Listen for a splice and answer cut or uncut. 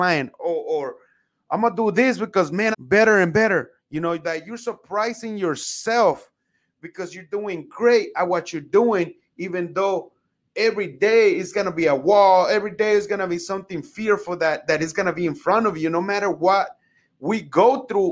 cut